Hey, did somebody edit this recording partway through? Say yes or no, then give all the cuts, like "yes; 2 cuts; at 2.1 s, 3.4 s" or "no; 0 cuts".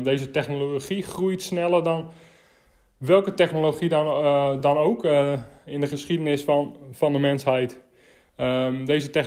no; 0 cuts